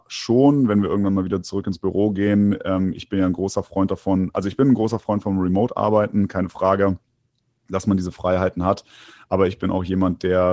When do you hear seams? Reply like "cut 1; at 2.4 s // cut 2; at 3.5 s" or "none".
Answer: none